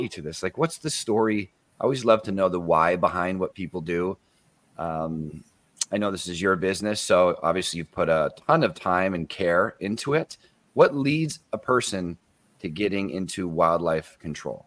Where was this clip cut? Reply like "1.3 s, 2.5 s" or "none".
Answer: none